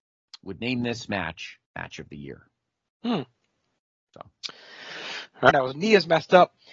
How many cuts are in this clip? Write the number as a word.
two